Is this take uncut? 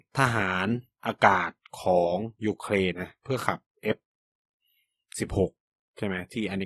no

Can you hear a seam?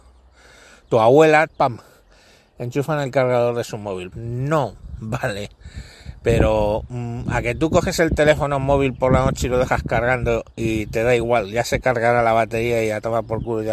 yes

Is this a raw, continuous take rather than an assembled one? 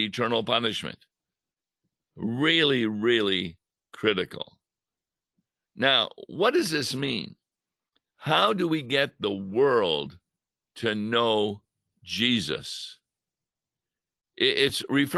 no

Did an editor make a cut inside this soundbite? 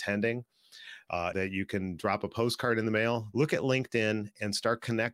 yes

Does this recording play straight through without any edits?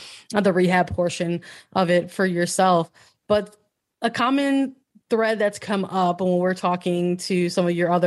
yes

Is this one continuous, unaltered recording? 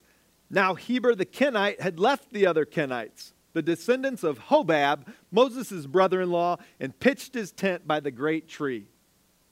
yes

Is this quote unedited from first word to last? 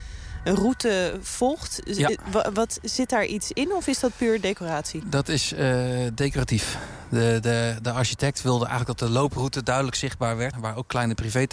no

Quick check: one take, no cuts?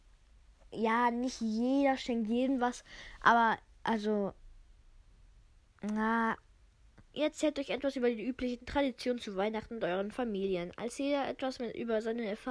no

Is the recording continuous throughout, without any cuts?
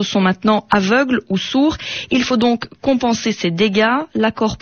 yes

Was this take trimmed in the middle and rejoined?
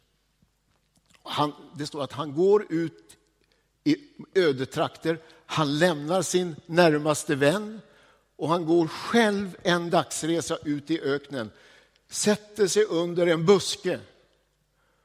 no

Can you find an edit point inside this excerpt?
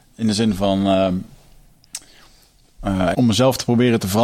yes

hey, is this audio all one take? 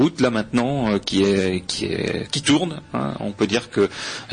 yes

